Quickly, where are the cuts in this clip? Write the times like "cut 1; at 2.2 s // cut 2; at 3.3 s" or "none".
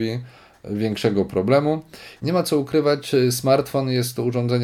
cut 1; at 2.2 s